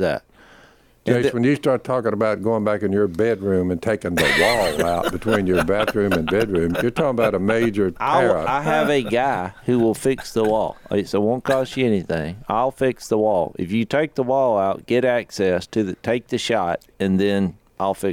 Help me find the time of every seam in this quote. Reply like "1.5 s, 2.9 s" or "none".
6.7 s